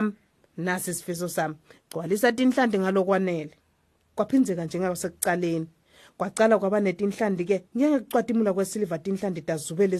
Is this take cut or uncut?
cut